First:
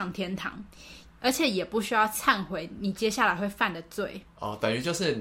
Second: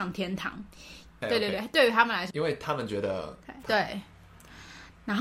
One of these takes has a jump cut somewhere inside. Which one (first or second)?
second